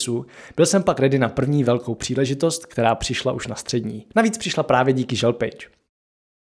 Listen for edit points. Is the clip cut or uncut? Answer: cut